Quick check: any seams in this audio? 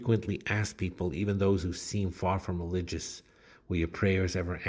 no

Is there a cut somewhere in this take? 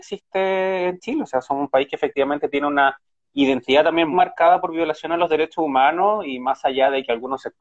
yes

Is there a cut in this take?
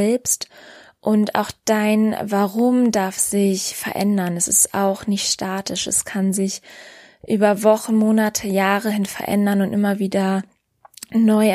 no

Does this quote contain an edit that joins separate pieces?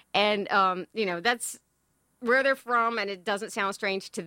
no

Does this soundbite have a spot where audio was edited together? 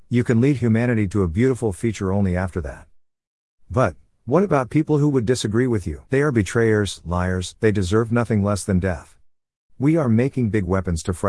yes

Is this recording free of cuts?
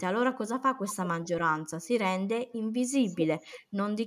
yes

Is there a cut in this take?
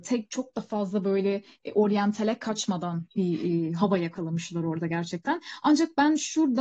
no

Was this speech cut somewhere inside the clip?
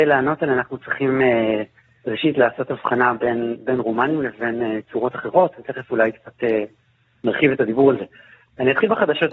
no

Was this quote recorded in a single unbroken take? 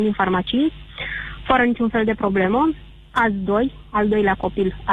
yes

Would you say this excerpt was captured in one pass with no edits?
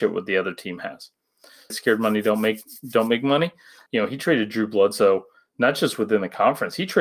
no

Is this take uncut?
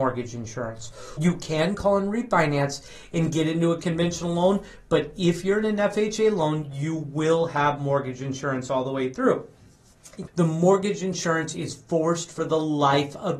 no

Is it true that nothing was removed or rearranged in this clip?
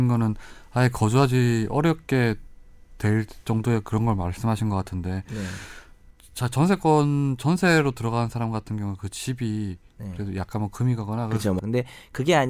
no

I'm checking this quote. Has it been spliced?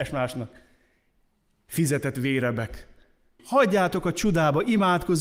yes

